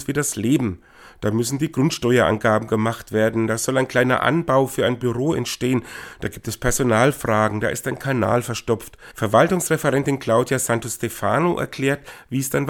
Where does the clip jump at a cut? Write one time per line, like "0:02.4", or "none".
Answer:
none